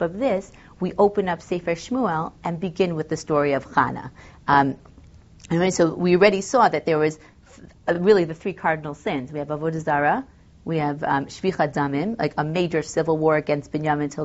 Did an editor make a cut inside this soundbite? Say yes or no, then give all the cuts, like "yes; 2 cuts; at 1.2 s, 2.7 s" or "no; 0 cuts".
no; 0 cuts